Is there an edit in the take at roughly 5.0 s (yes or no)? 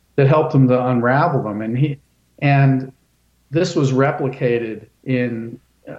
yes